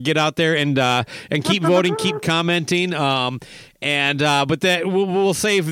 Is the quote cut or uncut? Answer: uncut